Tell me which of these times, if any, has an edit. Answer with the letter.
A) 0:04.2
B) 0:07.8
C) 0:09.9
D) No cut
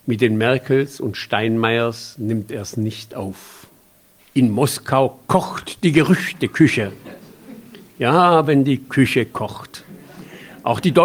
A